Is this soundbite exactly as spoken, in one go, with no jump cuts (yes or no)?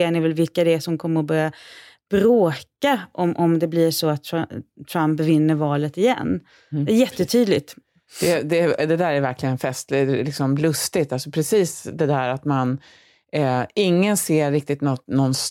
yes